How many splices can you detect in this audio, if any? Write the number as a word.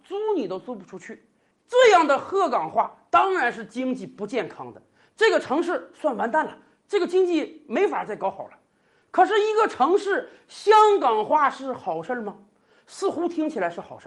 one